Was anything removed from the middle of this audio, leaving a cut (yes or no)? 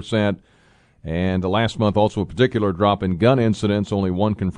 no